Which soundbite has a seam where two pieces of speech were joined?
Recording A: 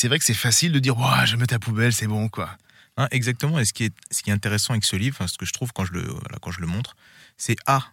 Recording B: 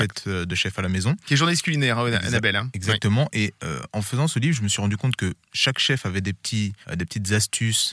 B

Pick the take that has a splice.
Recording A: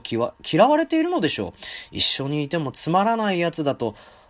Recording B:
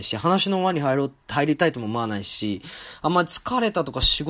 B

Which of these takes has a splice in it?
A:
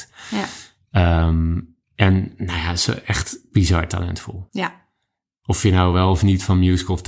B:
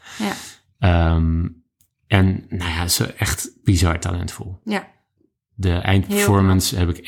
A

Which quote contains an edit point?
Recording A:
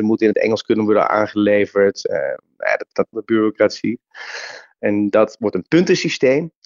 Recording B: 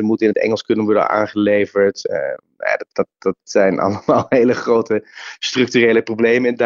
A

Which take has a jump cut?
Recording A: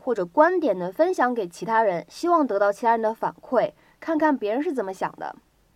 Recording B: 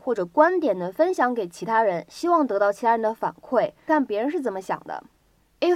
B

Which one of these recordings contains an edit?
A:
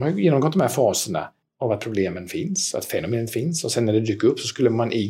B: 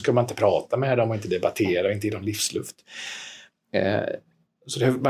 A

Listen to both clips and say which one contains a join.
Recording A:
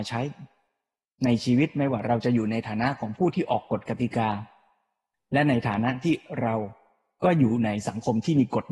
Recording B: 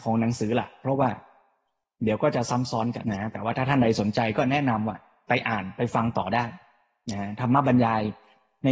B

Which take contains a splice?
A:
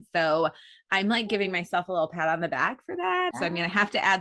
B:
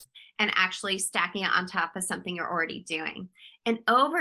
A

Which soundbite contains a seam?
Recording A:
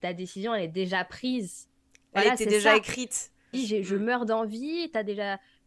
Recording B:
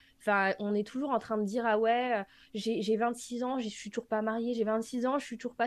A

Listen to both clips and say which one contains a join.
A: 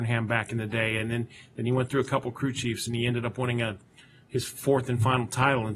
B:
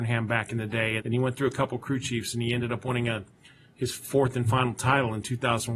B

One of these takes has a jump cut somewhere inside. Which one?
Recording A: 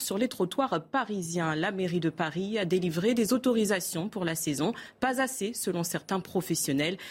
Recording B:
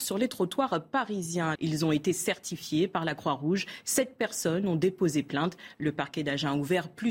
B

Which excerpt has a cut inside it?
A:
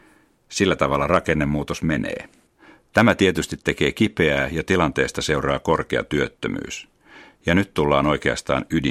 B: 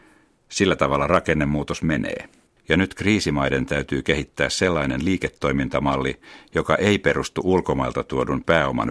B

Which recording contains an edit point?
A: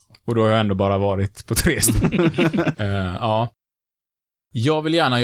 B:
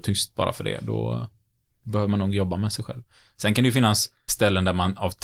A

